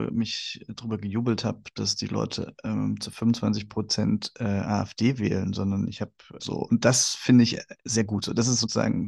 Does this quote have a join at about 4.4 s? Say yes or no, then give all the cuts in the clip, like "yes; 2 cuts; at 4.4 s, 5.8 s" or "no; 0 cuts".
no; 1 cut; at 6.4 s